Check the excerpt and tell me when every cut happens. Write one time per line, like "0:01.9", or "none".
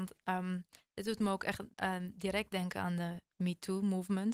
0:01.7